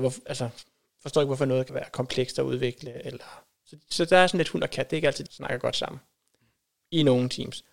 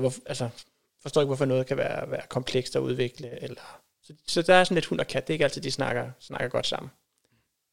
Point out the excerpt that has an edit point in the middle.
first; 2 cuts; at 1.7 s, 5.3 s

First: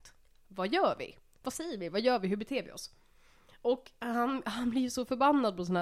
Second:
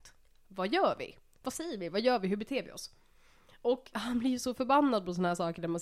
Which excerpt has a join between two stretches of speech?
second; 1 cut; at 3.9 s

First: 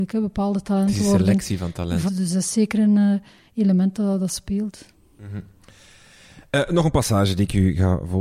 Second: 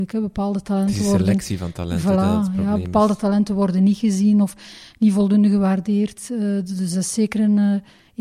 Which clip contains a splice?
first; 1 cut; at 2.1 s

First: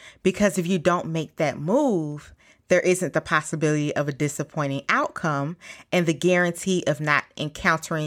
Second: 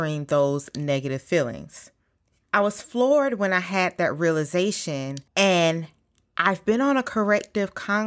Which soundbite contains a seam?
second; 2 cuts; at 2.4 s, 5.3 s

